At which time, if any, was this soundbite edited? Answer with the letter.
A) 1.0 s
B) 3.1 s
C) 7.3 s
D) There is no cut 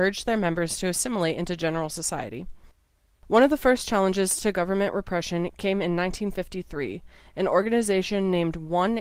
D